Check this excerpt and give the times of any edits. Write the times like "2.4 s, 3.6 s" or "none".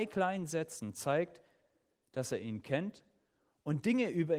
none